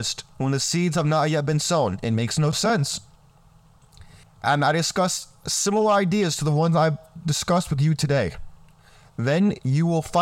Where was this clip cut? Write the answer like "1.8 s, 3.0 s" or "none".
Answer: 4.2 s, 9.0 s